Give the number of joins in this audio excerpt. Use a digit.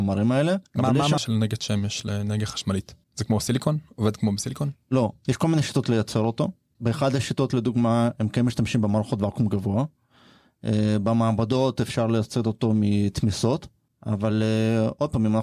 1